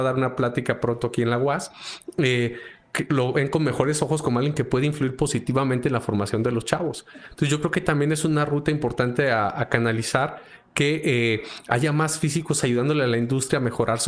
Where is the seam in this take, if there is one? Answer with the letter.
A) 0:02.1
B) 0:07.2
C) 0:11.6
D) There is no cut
D